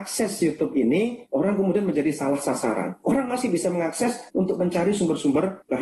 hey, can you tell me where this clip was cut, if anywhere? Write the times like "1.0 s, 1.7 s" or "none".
3.0 s